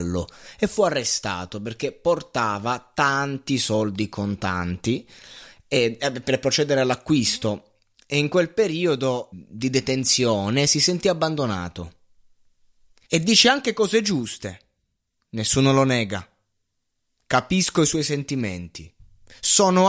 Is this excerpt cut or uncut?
cut